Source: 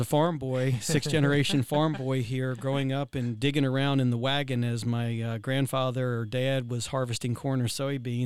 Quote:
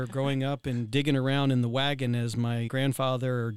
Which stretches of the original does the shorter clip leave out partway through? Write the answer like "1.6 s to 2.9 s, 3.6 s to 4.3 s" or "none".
5.2 s to 5.4 s